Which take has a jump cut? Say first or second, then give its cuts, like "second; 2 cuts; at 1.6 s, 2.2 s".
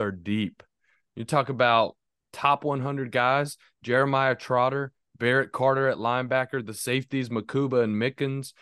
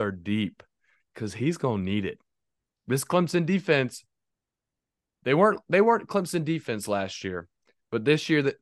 second; 1 cut; at 1.0 s